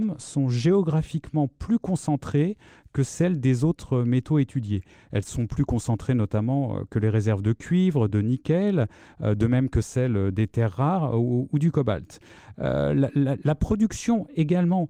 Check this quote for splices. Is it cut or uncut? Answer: uncut